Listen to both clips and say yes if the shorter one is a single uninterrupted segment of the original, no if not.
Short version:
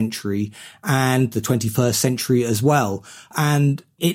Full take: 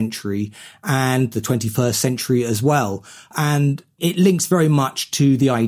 yes